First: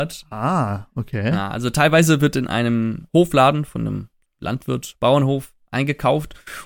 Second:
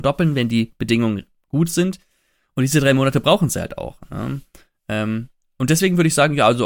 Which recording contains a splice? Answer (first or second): first